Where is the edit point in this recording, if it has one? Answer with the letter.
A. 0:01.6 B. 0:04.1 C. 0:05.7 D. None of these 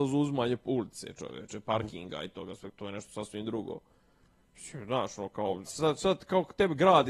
C